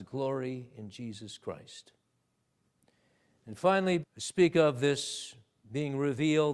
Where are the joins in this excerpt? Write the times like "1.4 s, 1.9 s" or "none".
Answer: 4.0 s